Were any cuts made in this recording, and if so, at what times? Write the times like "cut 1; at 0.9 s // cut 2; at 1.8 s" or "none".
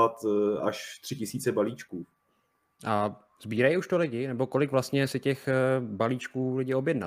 cut 1; at 2.8 s